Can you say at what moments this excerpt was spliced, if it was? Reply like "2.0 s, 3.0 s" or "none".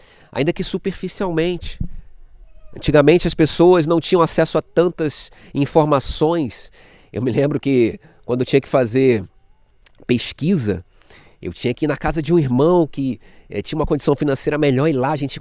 none